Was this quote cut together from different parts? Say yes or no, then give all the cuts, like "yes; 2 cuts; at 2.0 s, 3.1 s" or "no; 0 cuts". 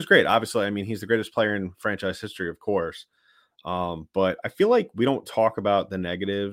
no; 0 cuts